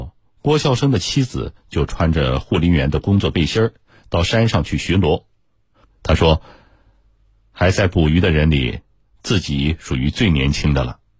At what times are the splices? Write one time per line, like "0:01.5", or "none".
0:05.8